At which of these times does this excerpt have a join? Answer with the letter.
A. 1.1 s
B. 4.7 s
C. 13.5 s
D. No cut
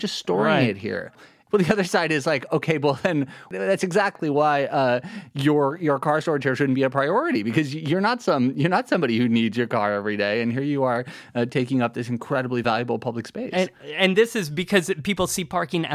D